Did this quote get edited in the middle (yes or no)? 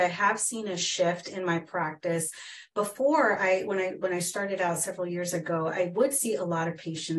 no